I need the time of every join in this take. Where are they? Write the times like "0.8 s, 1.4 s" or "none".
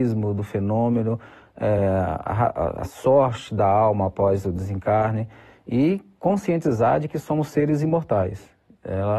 none